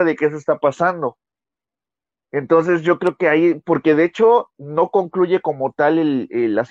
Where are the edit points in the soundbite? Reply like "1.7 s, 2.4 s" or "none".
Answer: none